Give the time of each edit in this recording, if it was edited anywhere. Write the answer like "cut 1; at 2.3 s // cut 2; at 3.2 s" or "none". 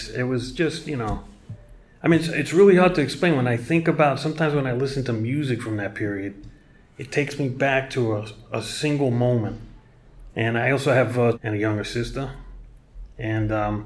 cut 1; at 10.3 s // cut 2; at 11.3 s